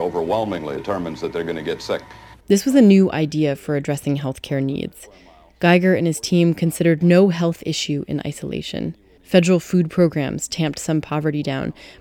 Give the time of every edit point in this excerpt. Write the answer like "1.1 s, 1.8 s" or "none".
2.4 s, 9.2 s